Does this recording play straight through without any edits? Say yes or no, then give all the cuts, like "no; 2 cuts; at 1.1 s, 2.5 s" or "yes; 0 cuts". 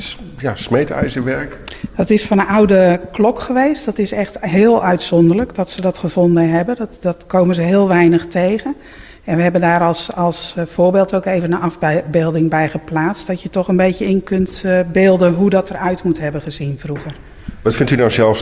yes; 0 cuts